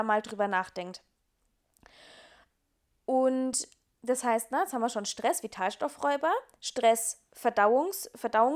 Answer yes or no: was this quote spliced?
no